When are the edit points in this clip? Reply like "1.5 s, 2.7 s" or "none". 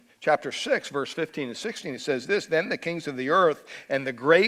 none